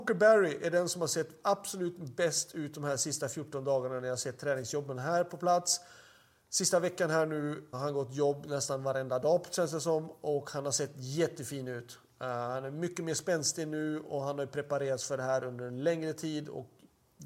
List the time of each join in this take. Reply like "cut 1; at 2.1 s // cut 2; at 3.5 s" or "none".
cut 1; at 7.7 s